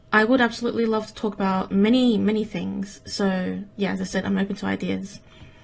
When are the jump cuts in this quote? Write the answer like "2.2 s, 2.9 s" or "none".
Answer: none